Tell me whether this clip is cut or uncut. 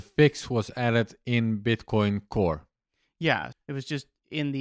cut